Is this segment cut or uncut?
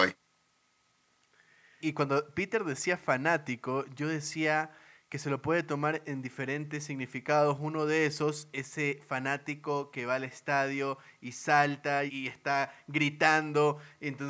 cut